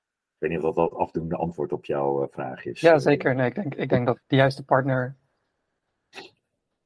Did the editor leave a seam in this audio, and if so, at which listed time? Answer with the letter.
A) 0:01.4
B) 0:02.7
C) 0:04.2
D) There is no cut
C